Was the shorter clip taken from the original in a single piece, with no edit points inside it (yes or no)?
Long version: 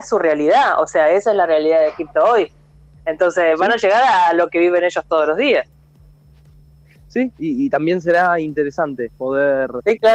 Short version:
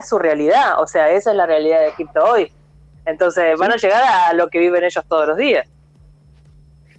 yes